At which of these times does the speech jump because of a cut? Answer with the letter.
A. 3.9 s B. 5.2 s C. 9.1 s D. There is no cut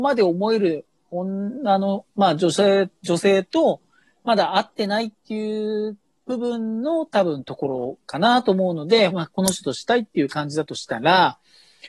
C